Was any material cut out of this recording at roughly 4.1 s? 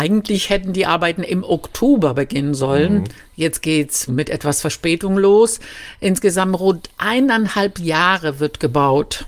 yes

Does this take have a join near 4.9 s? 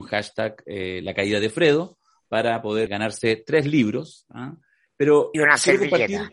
yes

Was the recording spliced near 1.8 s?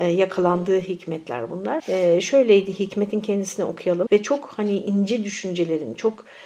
yes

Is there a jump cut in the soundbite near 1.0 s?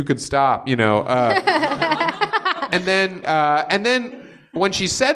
no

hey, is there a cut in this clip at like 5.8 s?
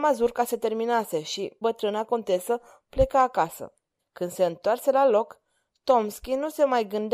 no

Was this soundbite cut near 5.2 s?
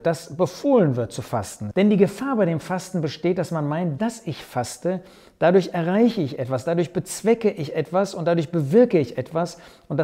no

